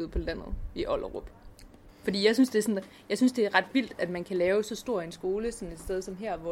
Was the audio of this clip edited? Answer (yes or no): yes